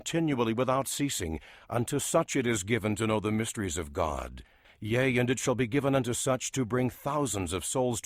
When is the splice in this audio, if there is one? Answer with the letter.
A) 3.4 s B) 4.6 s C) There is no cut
B